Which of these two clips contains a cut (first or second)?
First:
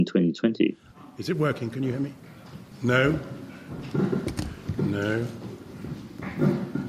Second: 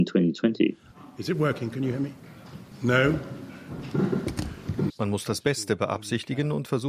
second